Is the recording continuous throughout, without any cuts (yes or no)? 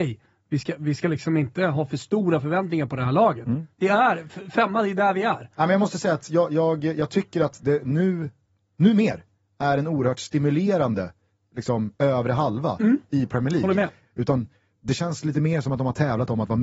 no